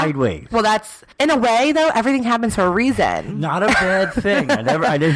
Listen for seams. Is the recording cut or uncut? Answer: cut